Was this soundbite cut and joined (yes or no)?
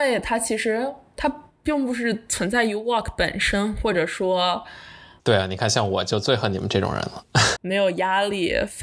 yes